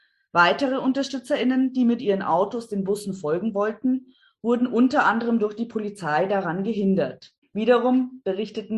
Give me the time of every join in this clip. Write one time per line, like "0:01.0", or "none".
0:07.4